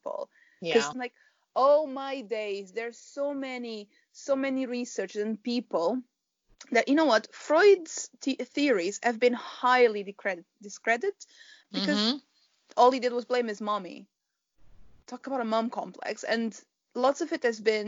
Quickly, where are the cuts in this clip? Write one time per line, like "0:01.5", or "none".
0:00.9